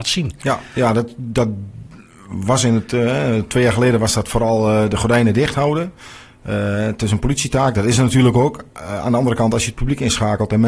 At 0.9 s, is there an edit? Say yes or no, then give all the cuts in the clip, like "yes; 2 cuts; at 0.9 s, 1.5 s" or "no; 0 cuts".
no; 0 cuts